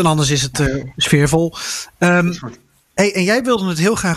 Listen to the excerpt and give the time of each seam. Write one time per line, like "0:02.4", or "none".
none